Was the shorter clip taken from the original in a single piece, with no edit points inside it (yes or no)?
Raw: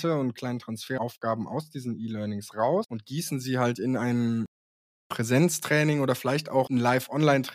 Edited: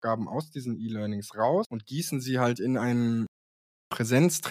yes